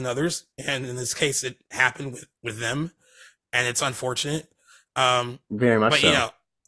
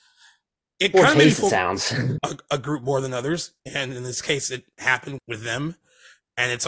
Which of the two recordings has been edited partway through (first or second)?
second